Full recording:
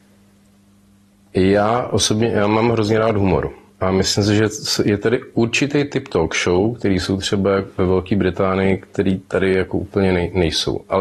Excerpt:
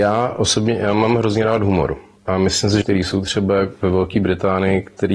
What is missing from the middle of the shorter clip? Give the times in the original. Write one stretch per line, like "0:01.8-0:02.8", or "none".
0:04.4-0:06.8

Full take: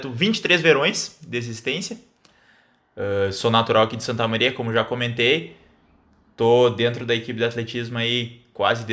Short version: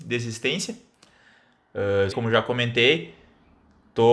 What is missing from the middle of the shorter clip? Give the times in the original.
0:03.3-0:04.5

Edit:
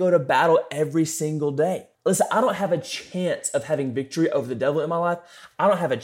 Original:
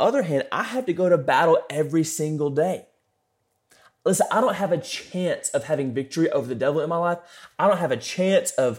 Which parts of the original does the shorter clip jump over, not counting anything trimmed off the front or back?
0:02.9-0:03.9

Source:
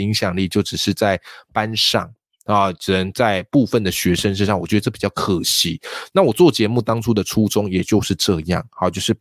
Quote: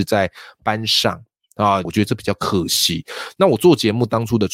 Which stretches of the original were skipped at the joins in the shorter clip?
0:02.7-0:04.6

